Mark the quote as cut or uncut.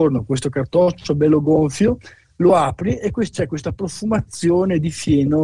uncut